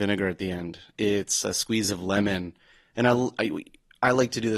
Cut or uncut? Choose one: uncut